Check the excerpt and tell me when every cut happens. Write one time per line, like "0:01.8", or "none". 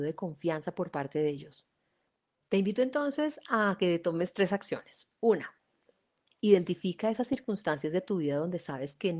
0:02.4